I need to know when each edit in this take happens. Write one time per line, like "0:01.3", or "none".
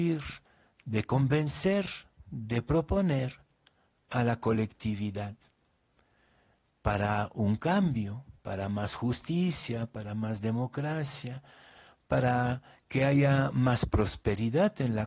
none